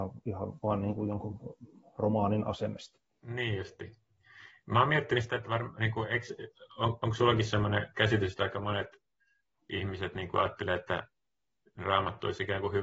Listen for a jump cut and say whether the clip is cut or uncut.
uncut